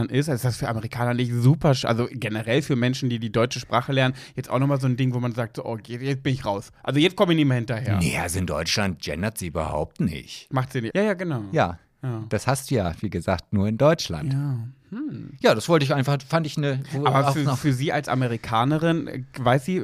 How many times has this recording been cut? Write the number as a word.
one